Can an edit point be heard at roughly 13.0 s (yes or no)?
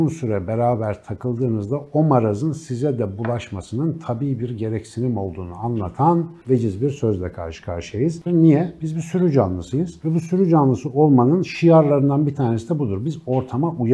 no